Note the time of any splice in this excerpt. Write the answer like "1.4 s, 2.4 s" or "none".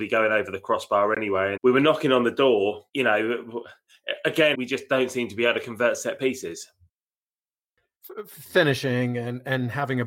1.6 s, 2.9 s, 4.5 s